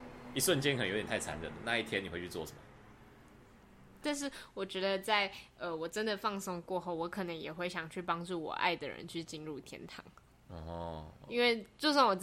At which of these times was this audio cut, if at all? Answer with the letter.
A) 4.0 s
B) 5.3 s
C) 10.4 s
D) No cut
A